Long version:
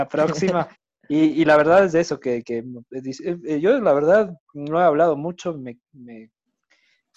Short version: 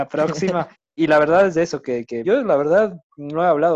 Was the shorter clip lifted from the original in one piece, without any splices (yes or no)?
no